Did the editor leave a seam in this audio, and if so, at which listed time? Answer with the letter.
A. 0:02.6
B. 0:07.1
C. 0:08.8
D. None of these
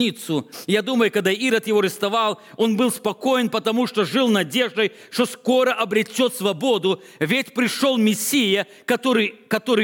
D